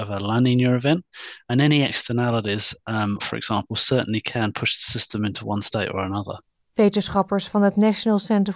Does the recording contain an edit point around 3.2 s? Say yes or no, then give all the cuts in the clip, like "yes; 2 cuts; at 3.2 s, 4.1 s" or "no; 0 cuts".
yes; 1 cut; at 3.2 s